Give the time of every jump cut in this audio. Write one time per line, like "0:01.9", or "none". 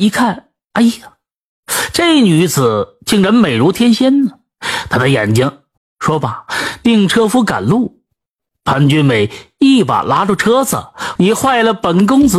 0:05.8
0:11.2